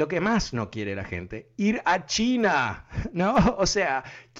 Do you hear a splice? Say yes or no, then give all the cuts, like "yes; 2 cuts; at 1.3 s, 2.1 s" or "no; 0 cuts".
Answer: no; 0 cuts